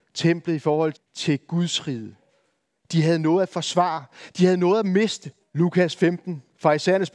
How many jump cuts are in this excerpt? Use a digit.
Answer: 2